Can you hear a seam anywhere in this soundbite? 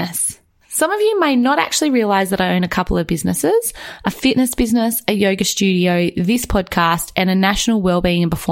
no; 0 cuts

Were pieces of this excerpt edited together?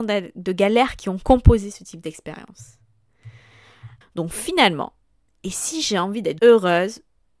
yes; 2 cuts; at 4.0 s, 6.4 s

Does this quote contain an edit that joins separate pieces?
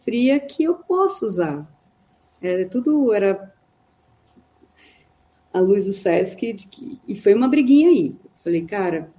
yes; 1 cut; at 6.5 s

